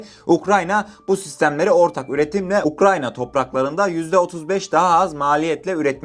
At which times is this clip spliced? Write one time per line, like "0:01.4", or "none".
none